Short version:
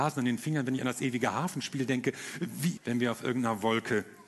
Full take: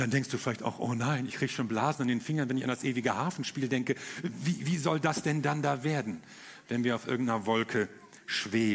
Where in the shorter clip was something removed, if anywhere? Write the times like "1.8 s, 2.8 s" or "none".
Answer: 2.8 s